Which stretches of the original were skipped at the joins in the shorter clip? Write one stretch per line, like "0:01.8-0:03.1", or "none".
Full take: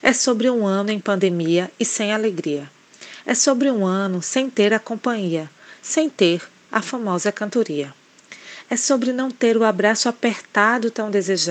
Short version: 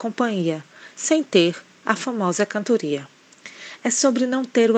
none